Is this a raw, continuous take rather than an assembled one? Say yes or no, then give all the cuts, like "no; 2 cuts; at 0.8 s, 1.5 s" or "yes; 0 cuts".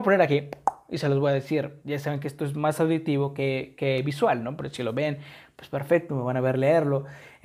yes; 0 cuts